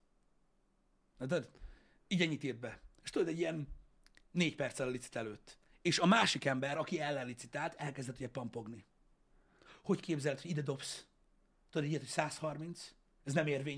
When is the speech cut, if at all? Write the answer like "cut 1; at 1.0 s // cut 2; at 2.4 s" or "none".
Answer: none